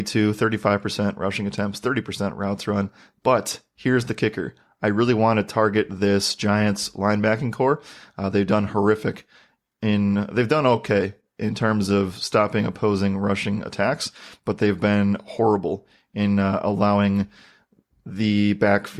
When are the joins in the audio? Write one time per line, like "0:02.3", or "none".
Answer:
none